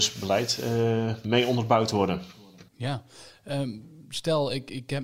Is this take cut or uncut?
cut